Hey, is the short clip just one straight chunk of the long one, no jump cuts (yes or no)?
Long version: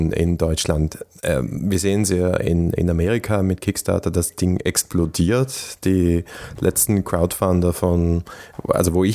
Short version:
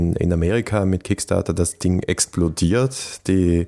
yes